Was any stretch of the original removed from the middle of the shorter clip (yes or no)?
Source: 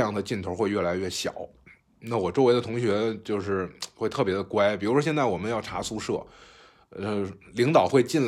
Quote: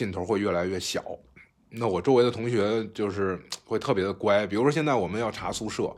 no